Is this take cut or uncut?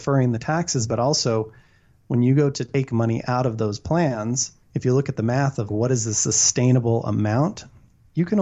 cut